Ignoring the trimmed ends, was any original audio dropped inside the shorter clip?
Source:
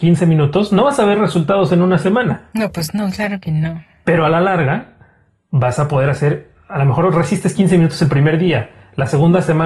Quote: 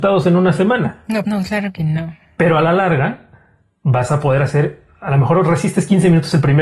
yes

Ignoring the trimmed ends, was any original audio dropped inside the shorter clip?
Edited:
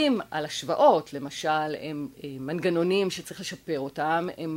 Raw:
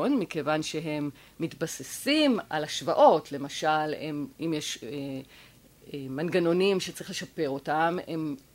yes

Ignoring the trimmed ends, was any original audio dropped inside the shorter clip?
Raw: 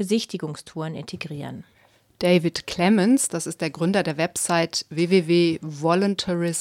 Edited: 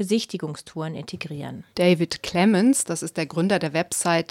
yes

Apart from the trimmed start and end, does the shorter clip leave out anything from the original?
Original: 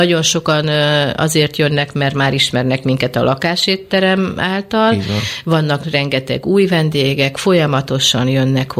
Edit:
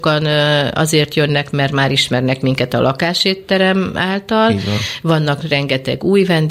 no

